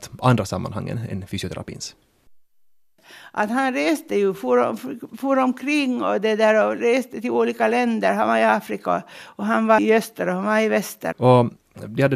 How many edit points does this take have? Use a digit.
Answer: 2